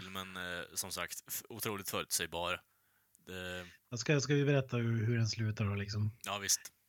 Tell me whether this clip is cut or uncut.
uncut